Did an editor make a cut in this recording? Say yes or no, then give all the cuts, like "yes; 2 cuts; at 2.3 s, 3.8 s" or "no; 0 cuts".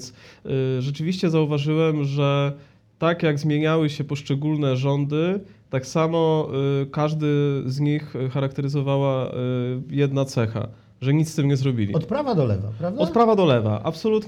no; 0 cuts